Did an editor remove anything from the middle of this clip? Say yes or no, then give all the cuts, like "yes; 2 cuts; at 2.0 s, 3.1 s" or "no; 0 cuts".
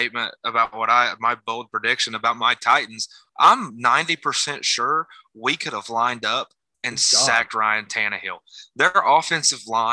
yes; 1 cut; at 3.3 s